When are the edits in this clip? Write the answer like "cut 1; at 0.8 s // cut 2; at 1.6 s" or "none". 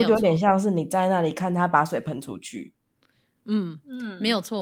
none